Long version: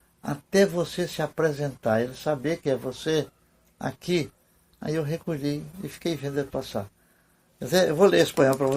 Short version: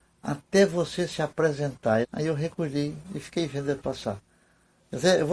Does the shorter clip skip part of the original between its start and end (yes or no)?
yes